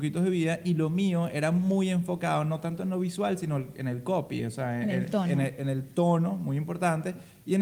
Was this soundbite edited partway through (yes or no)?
no